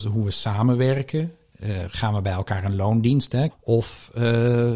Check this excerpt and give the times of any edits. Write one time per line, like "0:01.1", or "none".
0:03.5